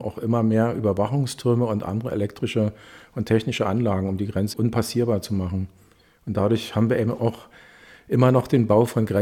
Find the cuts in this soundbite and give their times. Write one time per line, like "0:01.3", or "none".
0:04.5